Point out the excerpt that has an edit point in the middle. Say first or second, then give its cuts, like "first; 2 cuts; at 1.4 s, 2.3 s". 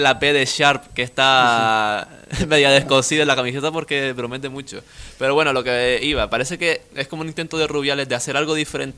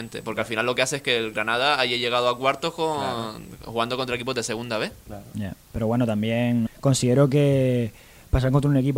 second; 2 cuts; at 5.6 s, 6.7 s